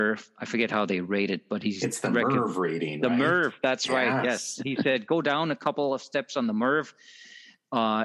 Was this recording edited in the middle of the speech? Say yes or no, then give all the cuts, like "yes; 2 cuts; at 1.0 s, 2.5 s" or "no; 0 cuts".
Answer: no; 0 cuts